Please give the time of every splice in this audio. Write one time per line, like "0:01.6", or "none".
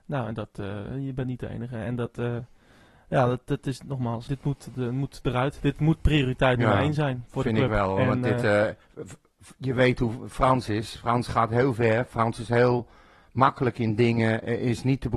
0:04.3